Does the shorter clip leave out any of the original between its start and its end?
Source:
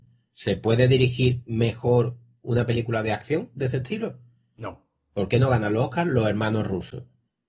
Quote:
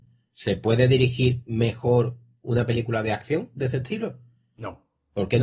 no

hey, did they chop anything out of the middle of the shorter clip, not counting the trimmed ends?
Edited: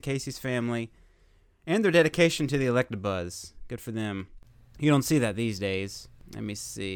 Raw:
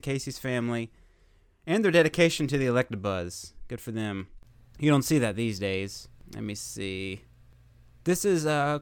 no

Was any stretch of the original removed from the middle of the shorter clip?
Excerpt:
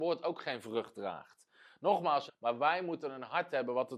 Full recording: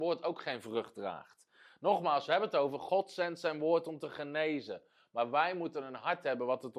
yes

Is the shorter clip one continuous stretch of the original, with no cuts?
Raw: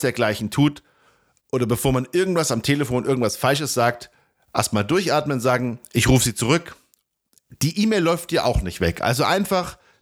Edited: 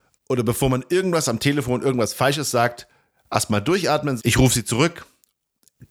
no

